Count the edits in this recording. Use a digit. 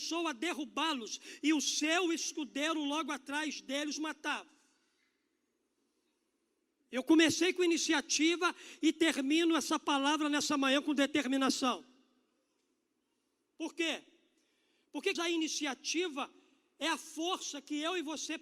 1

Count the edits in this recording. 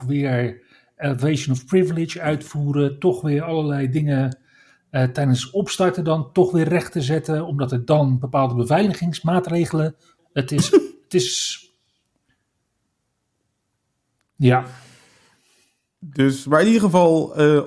1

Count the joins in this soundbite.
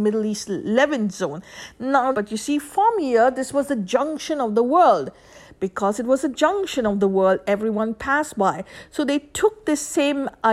1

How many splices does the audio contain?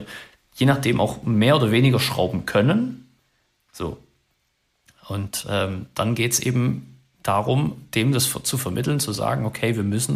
1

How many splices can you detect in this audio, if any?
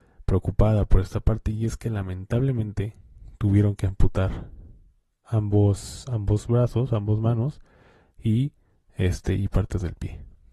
0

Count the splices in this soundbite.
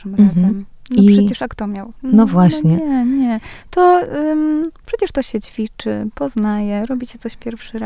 0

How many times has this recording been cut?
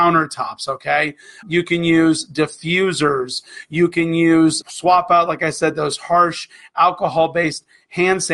2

